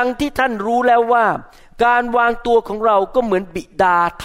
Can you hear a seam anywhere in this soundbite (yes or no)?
no